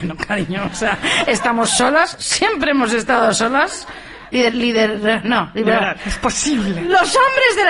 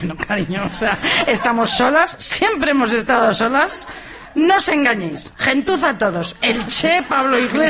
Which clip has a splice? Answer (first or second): first